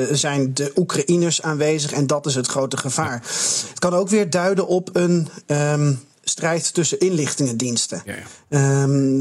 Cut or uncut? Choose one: uncut